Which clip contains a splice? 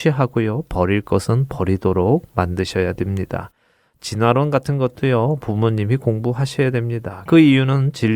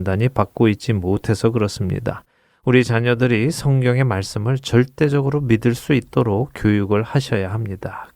first; 1 cut; at 7.3 s

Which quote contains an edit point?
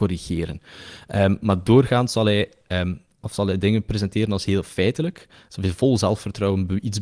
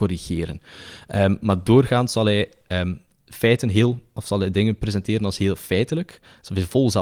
first; 1 cut; at 3.2 s

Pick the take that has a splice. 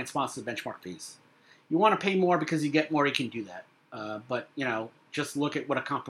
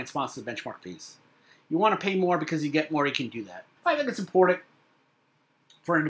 second; 1 cut; at 3.8 s

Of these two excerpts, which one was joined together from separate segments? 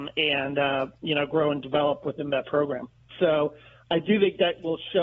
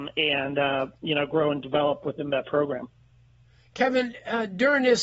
first; 1 cut; at 3.1 s

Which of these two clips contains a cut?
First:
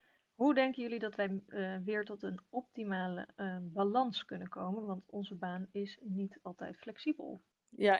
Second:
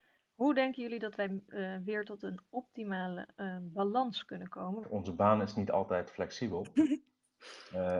second; 1 cut; at 4.8 s

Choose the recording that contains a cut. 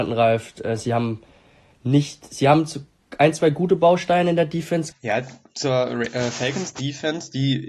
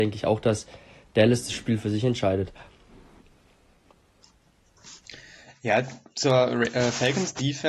first; 1 cut; at 4.9 s

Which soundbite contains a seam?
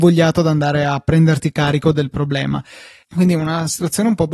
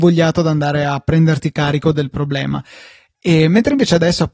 first; 1 cut; at 3.0 s

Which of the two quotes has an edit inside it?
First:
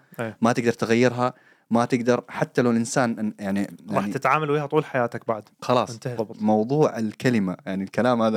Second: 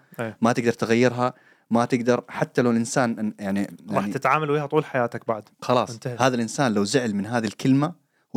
first; 1 cut; at 6.2 s

